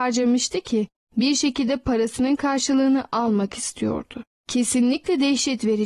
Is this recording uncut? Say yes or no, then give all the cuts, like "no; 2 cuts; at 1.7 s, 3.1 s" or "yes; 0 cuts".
yes; 0 cuts